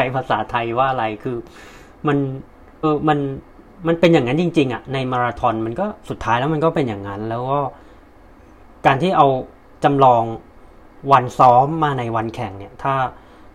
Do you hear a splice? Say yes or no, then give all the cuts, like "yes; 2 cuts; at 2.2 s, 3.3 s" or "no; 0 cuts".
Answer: yes; 1 cut; at 2.8 s